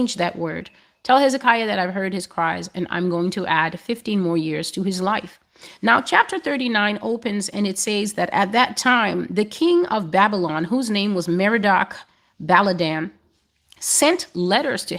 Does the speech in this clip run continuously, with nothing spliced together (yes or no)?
yes